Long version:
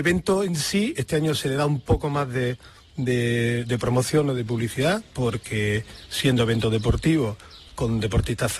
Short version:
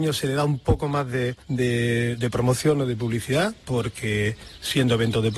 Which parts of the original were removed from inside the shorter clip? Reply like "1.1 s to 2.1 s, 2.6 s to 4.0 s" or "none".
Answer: 2.6 s to 2.9 s